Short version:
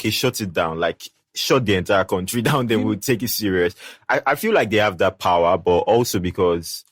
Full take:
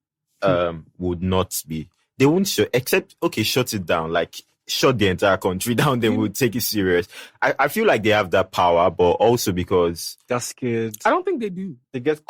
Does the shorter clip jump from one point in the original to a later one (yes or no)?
no